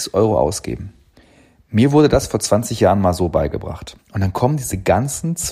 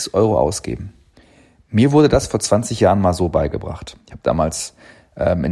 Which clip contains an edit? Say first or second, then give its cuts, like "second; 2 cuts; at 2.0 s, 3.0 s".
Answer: first; 1 cut; at 4.0 s